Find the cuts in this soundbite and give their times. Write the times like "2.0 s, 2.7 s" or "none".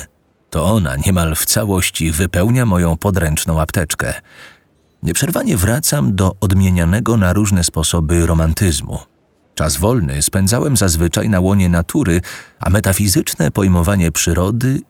9.4 s